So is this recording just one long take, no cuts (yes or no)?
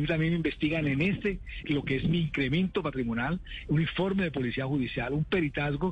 no